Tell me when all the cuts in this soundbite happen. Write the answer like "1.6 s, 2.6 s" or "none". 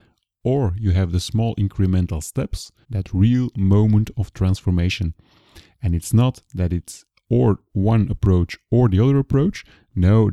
2.8 s

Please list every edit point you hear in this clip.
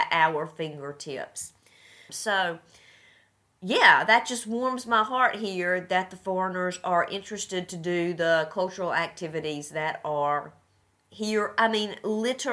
2.1 s

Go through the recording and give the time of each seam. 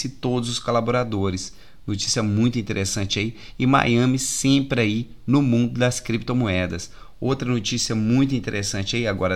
none

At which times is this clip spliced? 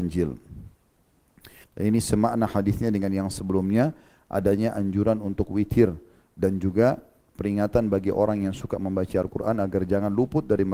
1.6 s

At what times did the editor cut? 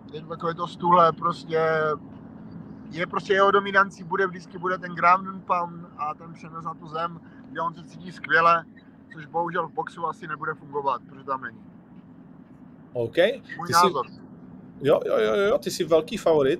none

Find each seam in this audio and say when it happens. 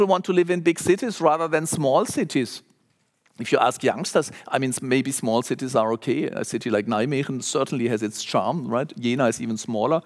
none

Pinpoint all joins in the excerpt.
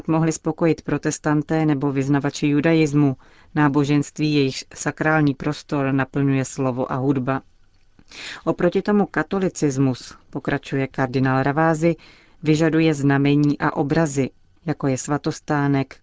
14.6 s

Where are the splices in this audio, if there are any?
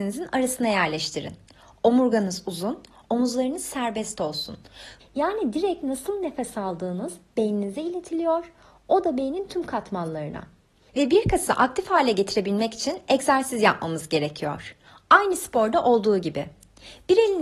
3.0 s, 5.0 s, 10.9 s

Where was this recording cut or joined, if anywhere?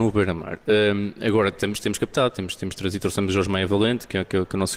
none

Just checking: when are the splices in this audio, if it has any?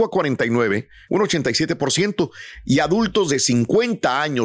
1.1 s

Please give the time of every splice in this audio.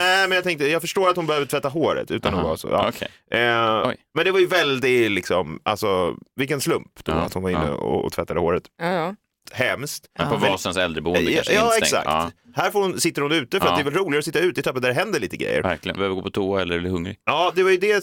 9.5 s, 16.0 s

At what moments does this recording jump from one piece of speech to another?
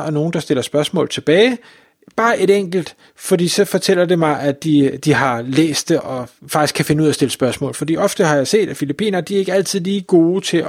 6.0 s

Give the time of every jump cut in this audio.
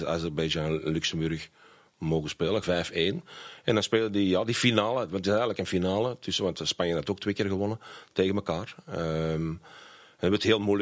2.6 s

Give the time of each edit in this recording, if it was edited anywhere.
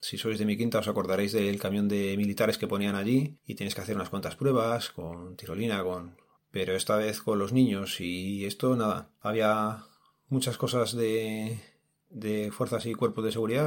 6.4 s

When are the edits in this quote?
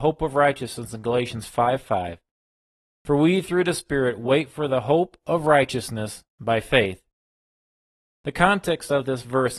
none

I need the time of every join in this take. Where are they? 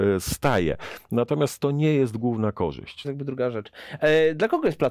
3.0 s

